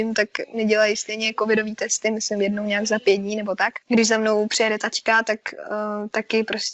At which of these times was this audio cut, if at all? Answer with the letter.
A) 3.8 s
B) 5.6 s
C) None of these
A